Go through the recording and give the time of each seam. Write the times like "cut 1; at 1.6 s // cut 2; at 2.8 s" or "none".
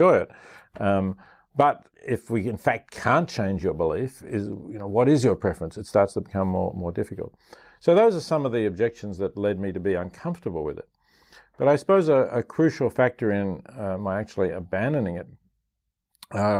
cut 1; at 1.9 s